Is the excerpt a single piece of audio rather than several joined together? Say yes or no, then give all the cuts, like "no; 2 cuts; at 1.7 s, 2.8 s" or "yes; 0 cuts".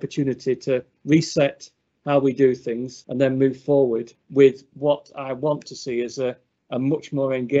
no; 1 cut; at 3.0 s